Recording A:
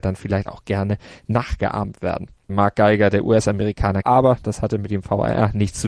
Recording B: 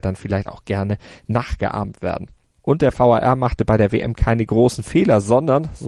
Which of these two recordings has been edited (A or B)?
A